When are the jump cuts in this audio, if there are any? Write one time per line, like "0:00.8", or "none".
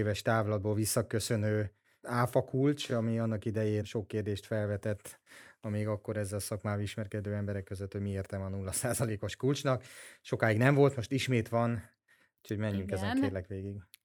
none